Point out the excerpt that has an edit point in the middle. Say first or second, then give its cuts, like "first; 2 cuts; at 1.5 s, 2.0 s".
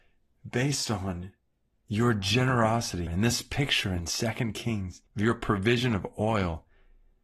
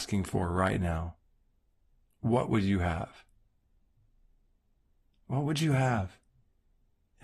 first; 2 cuts; at 3.1 s, 5.1 s